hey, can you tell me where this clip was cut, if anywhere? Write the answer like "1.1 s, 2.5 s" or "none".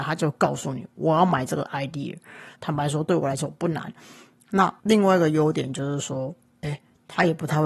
2.6 s